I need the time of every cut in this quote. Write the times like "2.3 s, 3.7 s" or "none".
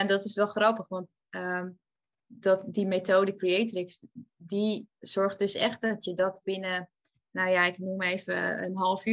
none